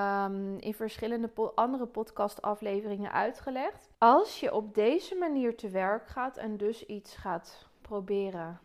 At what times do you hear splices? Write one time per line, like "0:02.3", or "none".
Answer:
0:03.9